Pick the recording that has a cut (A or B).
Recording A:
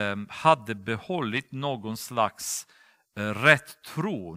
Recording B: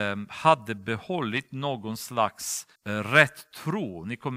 B